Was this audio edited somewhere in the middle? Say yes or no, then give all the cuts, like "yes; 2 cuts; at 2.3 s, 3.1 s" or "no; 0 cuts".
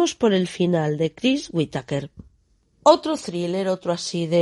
no; 0 cuts